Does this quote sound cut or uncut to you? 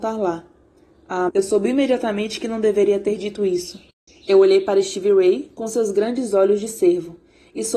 cut